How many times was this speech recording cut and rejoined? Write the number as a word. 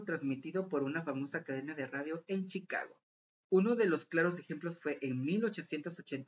one